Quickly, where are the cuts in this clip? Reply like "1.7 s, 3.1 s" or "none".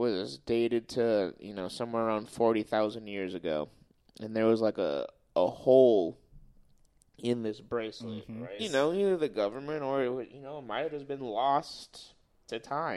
8.6 s